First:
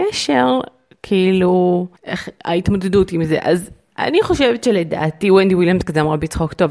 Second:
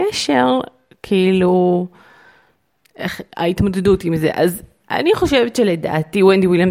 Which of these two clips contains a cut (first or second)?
first